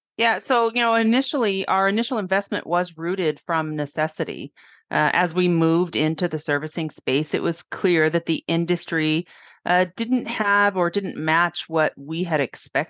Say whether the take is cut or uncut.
uncut